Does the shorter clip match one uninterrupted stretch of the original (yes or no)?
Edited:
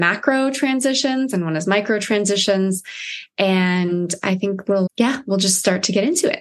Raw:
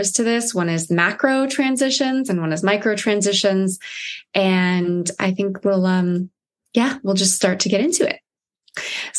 no